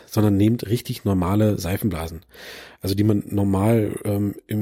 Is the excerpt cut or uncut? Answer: uncut